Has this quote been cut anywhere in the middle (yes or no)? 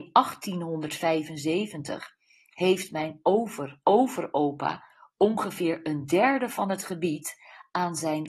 yes